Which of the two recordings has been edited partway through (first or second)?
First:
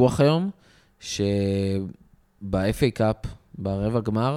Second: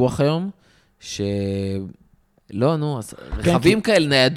second